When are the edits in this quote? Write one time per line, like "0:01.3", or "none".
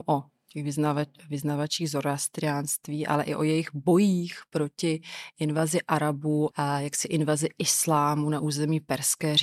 0:06.5